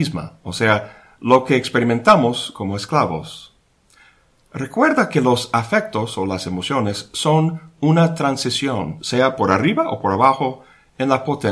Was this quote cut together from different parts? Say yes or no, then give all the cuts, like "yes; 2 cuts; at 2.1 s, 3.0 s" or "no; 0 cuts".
no; 0 cuts